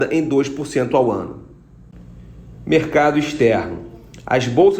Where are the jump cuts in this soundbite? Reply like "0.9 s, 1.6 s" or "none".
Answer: none